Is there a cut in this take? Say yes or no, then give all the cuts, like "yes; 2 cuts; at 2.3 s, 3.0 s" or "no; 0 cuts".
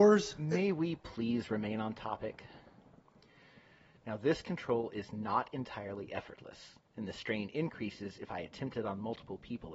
no; 0 cuts